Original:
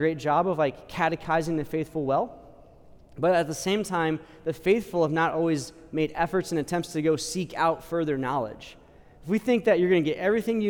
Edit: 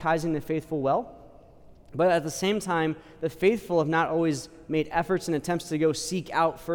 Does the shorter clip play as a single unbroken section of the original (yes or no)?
yes